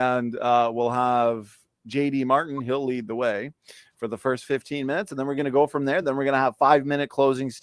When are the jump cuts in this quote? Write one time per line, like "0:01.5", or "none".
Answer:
none